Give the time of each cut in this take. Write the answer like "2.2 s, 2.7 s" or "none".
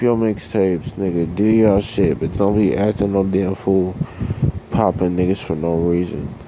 2.3 s